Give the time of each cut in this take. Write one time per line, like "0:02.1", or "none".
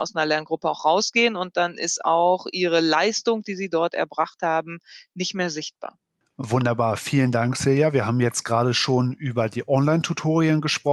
none